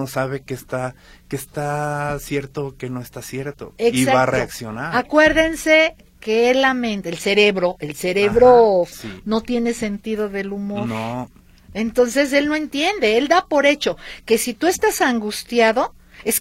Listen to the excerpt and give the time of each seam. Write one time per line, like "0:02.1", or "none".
0:08.9